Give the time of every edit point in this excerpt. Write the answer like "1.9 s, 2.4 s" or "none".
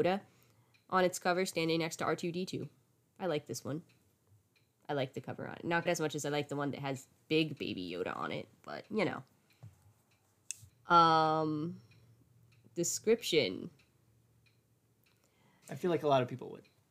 5.9 s, 10.7 s, 15.6 s